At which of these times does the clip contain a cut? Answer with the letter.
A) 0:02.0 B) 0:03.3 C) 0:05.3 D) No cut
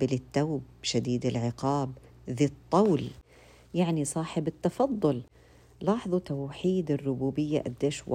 D